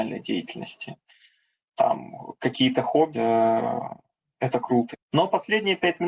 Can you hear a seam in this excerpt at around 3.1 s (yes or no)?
yes